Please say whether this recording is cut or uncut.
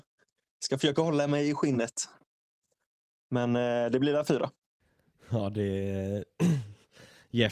uncut